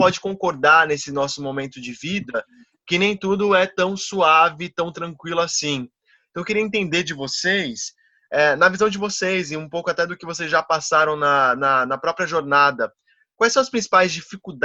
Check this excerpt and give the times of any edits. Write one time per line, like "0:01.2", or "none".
none